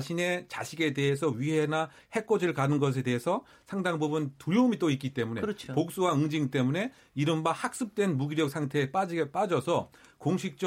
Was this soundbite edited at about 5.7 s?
no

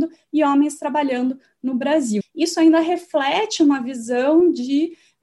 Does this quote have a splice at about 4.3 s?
no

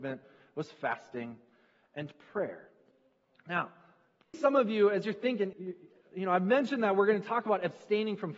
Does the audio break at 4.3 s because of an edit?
yes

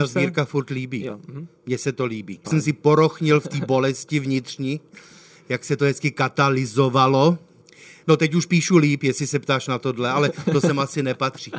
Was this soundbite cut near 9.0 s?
no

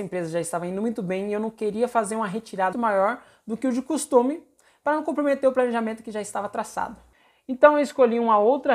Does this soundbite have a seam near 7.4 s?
no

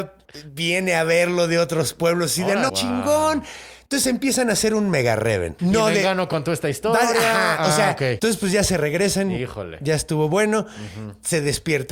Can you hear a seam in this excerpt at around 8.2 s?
yes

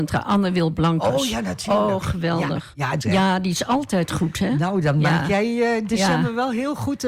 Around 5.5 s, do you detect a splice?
no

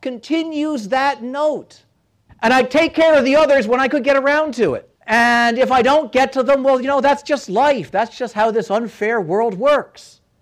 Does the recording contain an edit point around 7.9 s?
no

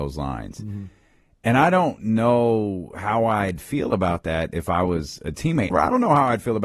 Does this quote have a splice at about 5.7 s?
yes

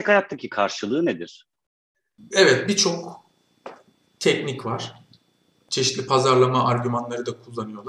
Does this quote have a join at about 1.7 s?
no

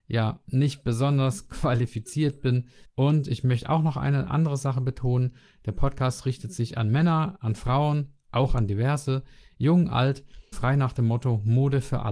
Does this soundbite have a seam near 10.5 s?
yes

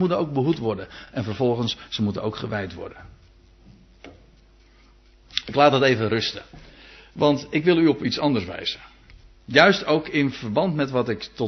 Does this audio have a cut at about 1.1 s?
no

